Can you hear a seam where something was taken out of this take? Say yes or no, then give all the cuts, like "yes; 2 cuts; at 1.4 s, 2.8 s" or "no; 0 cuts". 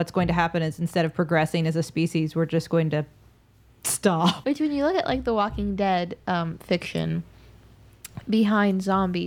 yes; 1 cut; at 4.4 s